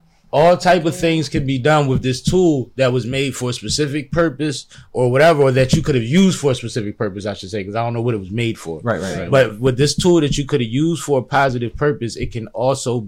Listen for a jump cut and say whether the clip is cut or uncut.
uncut